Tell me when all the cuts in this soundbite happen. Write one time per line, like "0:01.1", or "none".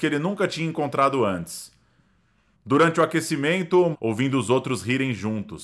0:02.5
0:03.9